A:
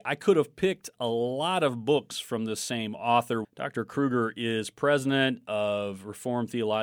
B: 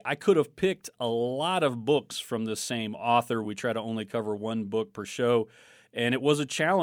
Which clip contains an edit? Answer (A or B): A